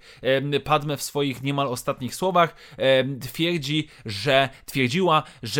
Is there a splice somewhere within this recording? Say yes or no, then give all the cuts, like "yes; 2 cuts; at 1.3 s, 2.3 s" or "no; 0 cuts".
no; 0 cuts